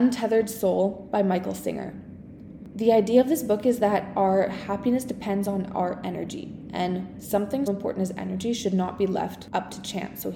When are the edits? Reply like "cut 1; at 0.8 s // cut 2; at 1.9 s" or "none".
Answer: cut 1; at 7.7 s